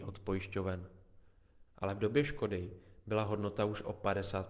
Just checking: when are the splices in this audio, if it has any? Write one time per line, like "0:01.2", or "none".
0:01.7